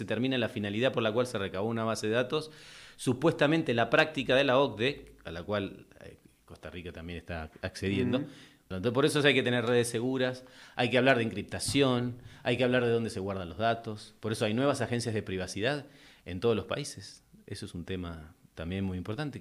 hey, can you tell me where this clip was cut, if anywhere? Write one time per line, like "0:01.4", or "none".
0:08.7